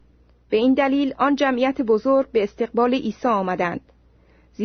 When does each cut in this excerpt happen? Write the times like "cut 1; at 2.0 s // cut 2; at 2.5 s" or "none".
none